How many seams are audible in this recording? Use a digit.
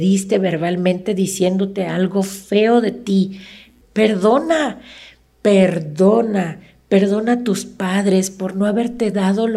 1